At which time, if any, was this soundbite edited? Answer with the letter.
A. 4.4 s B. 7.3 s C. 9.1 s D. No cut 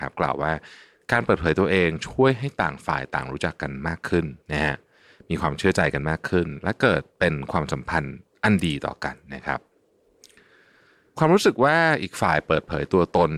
A